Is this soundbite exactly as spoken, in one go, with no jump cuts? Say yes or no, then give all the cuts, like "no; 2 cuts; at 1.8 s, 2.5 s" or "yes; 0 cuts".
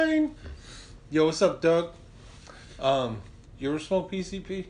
yes; 0 cuts